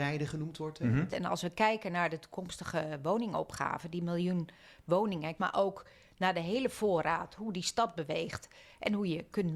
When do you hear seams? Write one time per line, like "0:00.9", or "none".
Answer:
0:01.1
0:05.4